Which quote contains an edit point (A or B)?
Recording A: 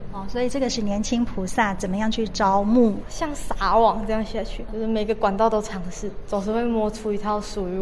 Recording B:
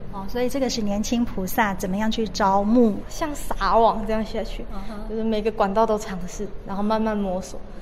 A